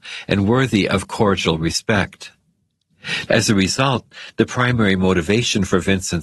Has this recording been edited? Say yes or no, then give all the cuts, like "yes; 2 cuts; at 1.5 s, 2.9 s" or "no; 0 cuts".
yes; 1 cut; at 3.3 s